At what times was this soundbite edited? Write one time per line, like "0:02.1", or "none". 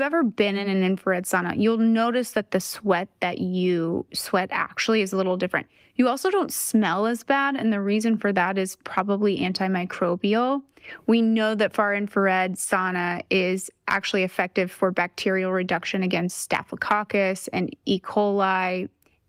none